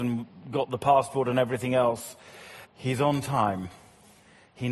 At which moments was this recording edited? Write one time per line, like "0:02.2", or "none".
0:02.6